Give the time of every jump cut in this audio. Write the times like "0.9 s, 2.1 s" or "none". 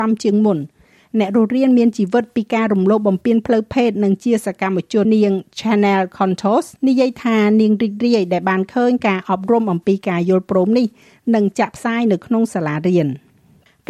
5.0 s, 6.8 s

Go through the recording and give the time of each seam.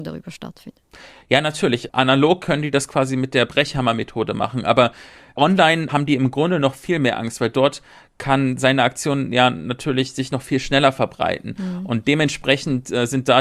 none

